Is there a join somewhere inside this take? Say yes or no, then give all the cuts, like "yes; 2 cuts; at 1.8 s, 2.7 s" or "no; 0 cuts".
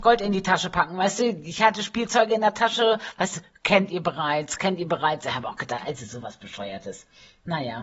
yes; 1 cut; at 4.6 s